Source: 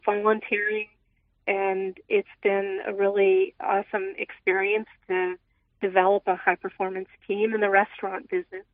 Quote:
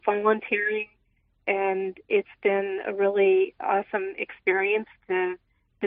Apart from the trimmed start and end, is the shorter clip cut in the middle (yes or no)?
no